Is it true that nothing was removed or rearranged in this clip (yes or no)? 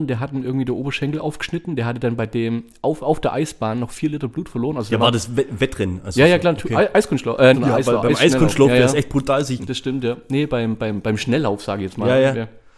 no